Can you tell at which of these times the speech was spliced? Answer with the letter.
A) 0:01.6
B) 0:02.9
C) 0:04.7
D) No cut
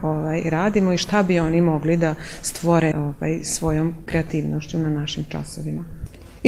B